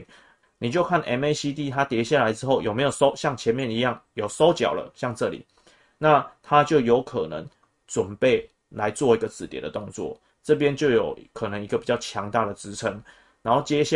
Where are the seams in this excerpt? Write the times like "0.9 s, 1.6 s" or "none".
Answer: 10.3 s

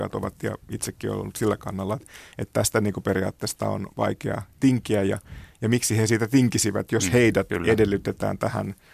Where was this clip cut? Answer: none

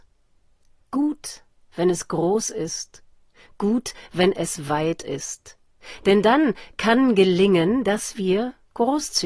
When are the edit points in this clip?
none

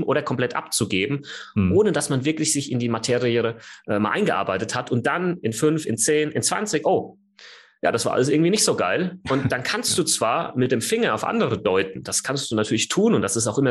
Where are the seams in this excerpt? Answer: 6.8 s

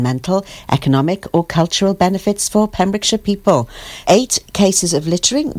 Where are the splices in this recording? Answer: 4.0 s

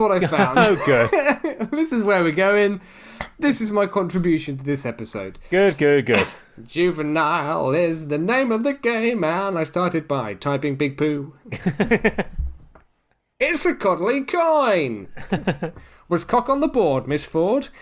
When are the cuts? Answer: none

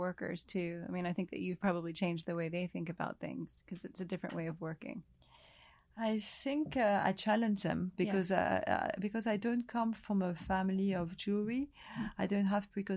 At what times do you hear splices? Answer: none

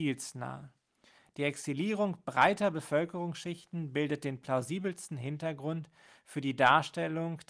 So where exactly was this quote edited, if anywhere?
none

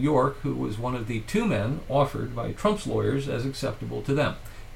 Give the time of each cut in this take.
none

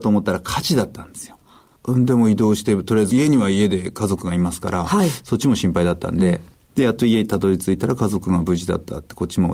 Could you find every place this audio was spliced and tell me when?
1.8 s

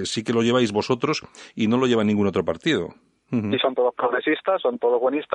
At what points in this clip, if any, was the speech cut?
3.2 s

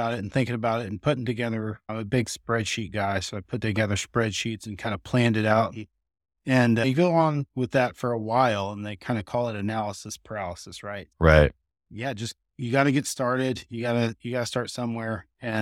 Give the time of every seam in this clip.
none

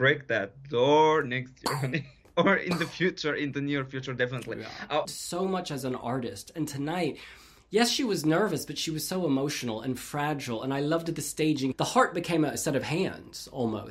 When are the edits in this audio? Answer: 5.1 s, 11.7 s

